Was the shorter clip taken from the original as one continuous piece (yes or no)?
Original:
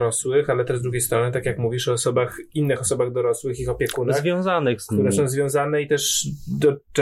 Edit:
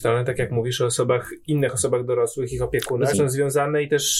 no